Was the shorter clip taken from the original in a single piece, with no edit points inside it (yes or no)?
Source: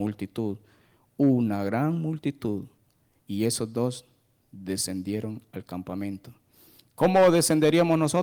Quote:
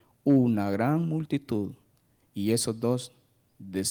yes